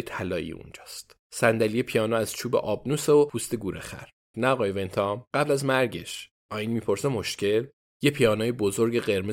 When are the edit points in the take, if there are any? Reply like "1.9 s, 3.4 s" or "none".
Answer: 4.3 s, 7.9 s